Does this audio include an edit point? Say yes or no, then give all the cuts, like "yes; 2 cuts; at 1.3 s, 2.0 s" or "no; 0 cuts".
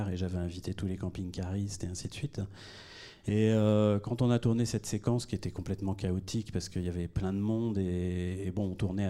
no; 0 cuts